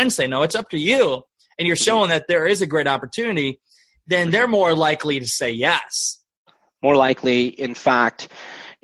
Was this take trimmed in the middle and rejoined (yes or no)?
no